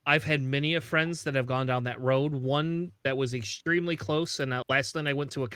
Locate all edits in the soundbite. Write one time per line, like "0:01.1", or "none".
0:04.6